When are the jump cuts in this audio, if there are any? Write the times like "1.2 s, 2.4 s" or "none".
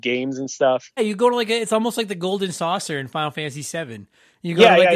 1.0 s